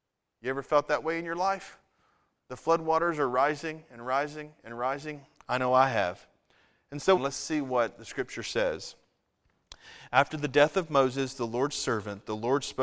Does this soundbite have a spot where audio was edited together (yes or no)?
yes